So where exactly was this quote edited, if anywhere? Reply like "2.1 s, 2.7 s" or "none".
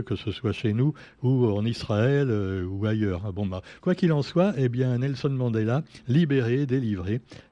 3.8 s